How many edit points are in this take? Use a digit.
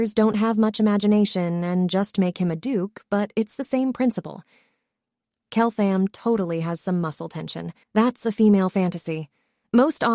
2